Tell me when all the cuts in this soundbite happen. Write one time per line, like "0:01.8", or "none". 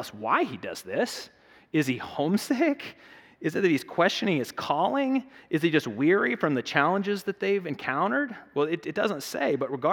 none